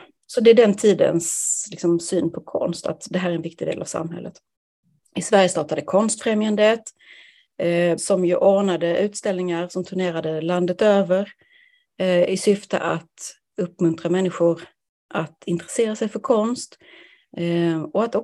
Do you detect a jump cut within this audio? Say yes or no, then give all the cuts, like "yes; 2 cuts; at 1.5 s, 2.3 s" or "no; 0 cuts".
yes; 1 cut; at 8.0 s